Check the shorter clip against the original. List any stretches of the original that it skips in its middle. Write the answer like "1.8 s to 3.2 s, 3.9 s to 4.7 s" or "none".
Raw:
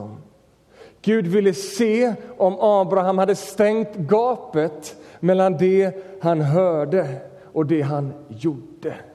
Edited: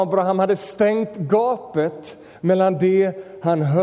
none